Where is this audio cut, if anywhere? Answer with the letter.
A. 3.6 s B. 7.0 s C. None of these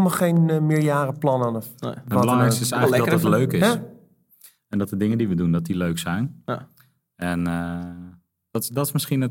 C